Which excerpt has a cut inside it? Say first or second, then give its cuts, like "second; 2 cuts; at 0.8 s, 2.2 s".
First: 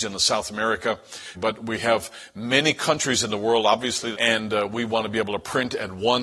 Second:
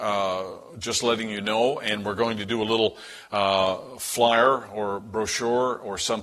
first; 2 cuts; at 1.3 s, 4.1 s